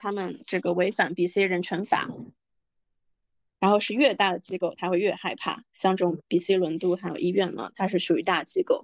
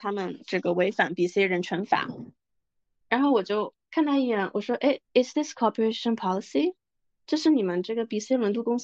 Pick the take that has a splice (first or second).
second